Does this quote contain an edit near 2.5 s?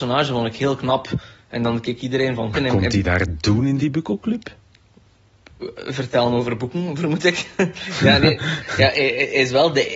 yes; 1 cut; at 2.5 s

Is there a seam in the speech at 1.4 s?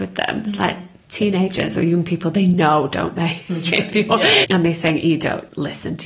no; 1 cut; at 4.4 s

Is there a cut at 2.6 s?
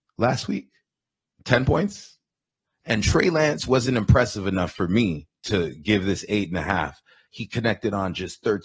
yes; 1 cut; at 2.6 s

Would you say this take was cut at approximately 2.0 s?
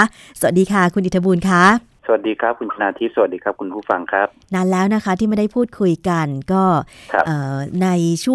yes; 1 cut; at 2.0 s

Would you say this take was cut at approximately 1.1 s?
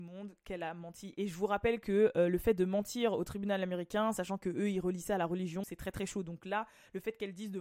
no; 1 cut; at 5.6 s

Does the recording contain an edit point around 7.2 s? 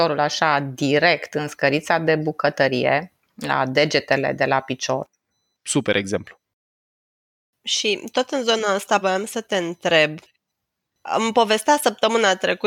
no; 2 cuts; at 5.5 s, 9.0 s

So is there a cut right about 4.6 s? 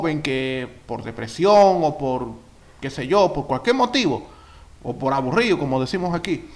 no; 0 cuts

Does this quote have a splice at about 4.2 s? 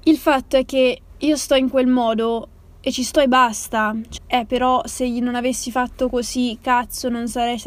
yes; 1 cut; at 4.2 s

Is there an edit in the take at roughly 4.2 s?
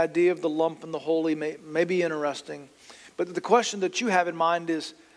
no; 1 cut; at 1.6 s

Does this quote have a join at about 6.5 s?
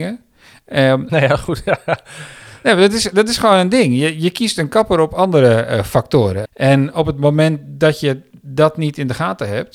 yes; 2 cuts; at 1.1 s, 6.5 s

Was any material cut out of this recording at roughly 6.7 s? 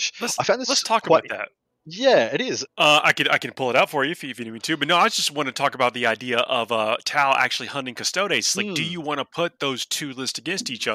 no; 1 cut; at 2.7 s

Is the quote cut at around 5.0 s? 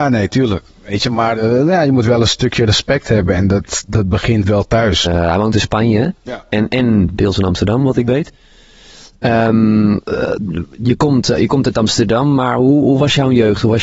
yes; 1 cut; at 5.0 s

